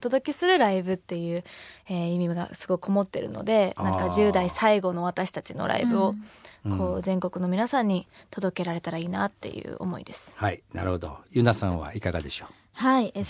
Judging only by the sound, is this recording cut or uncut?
uncut